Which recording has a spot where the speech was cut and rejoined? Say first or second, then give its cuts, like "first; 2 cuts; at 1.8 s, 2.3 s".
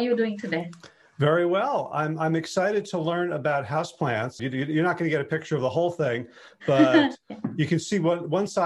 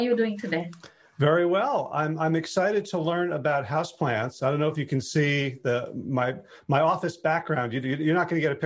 first; 1 cut; at 4.4 s